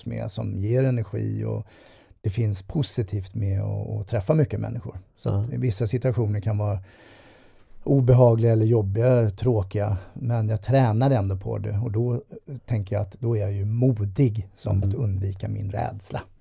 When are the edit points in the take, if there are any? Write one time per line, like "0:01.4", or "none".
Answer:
0:05.5
0:14.8